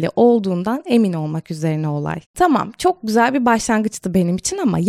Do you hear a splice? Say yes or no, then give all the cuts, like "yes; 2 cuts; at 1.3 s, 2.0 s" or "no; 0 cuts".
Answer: yes; 1 cut; at 2.2 s